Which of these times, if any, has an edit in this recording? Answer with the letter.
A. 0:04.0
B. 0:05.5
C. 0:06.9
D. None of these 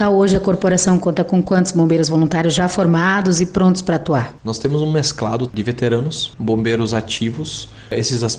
B